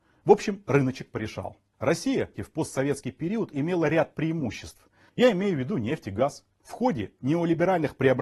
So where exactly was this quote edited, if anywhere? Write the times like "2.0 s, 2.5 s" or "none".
2.4 s, 5.1 s, 6.5 s